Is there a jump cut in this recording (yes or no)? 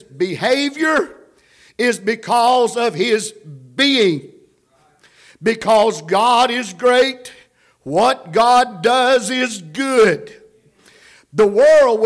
no